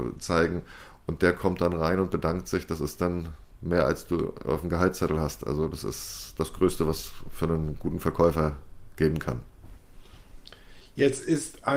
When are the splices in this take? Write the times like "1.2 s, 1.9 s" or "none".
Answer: none